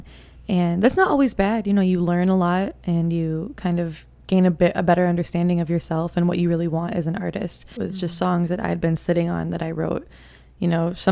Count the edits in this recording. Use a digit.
1